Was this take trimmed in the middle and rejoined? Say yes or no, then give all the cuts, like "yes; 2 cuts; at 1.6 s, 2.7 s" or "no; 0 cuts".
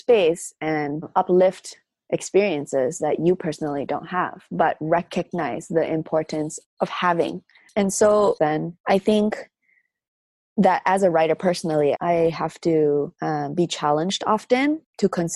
yes; 2 cuts; at 8.4 s, 11.9 s